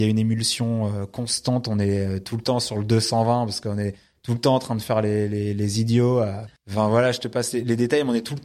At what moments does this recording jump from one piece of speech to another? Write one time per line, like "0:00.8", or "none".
0:06.6